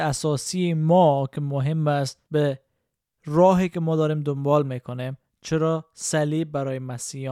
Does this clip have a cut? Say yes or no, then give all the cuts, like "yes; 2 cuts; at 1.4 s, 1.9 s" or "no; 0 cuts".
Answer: yes; 1 cut; at 2.2 s